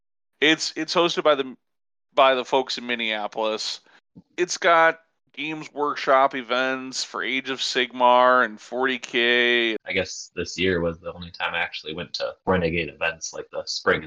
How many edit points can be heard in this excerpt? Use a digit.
2